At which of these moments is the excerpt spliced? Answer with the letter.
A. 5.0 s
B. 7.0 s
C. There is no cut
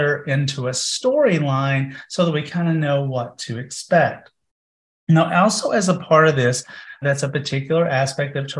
B